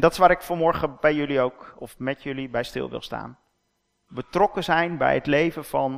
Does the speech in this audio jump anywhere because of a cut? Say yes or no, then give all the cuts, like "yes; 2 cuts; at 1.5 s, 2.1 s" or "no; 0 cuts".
no; 0 cuts